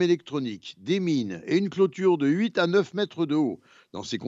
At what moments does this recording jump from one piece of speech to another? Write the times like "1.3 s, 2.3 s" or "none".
none